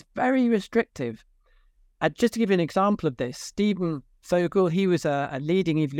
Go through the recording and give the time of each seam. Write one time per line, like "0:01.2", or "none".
none